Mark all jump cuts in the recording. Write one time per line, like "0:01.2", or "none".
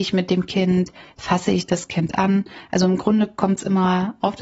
none